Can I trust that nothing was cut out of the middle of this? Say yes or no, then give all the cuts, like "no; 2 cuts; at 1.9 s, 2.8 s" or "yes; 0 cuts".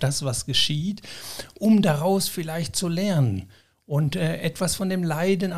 yes; 0 cuts